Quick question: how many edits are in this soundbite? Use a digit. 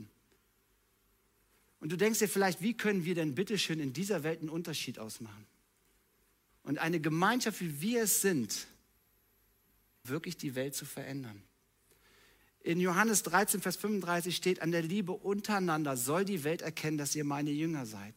2